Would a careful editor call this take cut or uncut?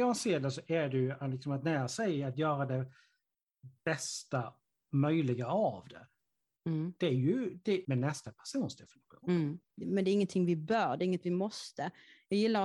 cut